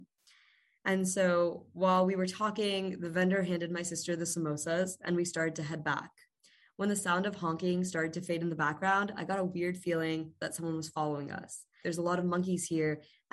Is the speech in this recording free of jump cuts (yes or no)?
no